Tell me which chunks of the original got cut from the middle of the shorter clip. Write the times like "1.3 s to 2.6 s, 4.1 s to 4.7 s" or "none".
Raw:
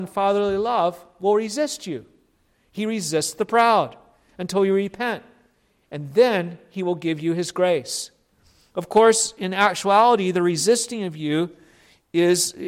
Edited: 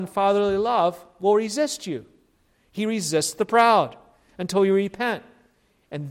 none